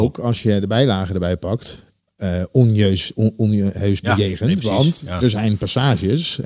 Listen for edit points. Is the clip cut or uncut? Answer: uncut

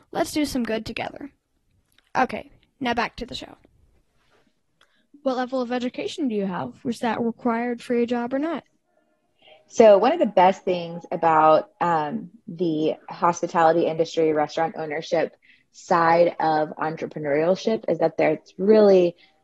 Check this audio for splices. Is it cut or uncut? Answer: uncut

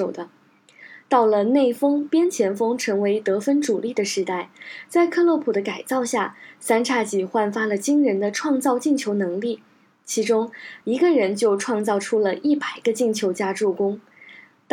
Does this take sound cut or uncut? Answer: cut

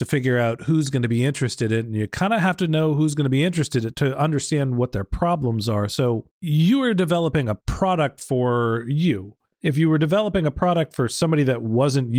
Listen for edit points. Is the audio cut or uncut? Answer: uncut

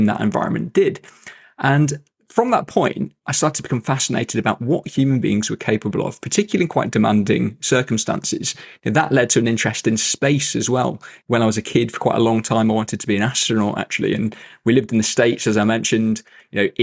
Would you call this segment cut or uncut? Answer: uncut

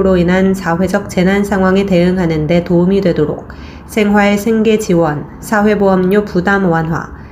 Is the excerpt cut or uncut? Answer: uncut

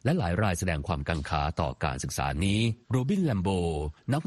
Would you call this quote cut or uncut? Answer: cut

